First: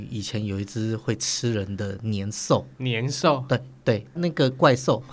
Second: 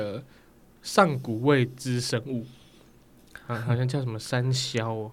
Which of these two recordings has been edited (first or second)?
first